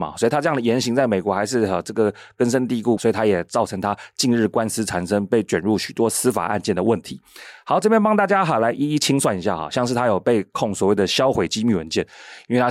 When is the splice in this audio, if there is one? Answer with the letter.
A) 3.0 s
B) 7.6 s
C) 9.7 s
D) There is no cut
A